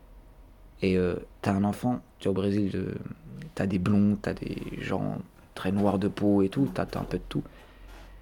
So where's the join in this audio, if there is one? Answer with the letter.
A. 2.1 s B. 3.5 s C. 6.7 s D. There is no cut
A